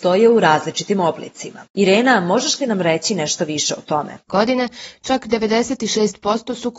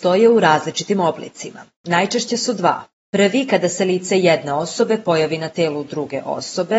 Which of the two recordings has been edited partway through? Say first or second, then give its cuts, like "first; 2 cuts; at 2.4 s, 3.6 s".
first; 2 cuts; at 1.7 s, 4.3 s